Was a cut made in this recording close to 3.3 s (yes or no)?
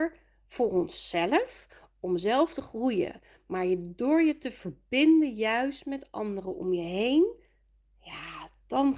no